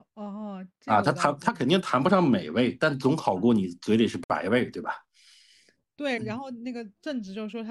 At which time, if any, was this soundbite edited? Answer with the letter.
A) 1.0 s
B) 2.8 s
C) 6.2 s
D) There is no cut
C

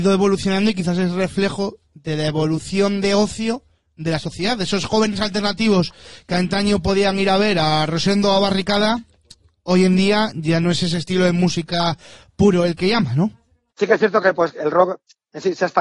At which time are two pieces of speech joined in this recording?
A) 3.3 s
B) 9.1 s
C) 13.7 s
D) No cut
C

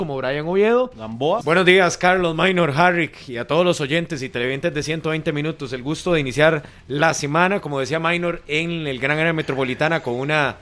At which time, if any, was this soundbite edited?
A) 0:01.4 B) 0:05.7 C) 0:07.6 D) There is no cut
A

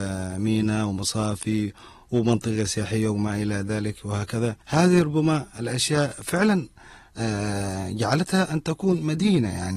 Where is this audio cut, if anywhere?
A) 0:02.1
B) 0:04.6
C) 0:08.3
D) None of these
B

